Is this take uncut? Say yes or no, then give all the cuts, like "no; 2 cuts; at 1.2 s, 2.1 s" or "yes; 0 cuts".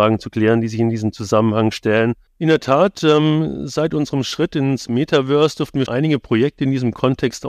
no; 2 cuts; at 2.3 s, 5.9 s